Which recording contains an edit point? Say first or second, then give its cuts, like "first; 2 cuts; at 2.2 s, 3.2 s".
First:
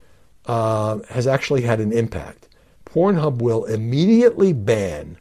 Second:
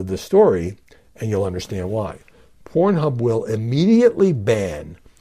first; 1 cut; at 2.8 s